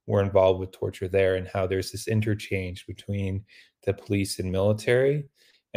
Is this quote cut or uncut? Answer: uncut